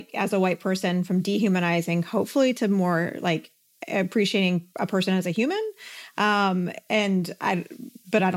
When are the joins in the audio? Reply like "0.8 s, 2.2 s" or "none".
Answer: none